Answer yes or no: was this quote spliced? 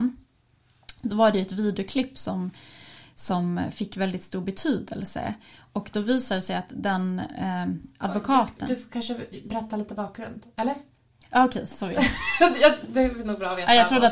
no